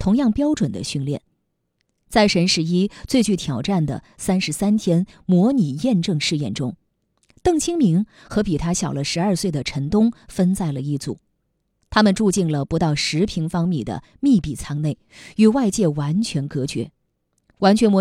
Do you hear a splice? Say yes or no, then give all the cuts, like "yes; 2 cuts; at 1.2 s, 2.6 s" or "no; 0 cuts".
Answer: no; 0 cuts